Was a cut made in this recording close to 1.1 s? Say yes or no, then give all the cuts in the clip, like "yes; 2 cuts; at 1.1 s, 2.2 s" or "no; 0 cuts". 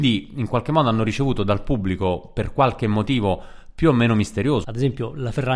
no; 1 cut; at 4.6 s